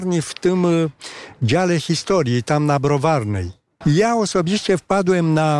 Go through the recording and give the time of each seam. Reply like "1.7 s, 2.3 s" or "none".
3.8 s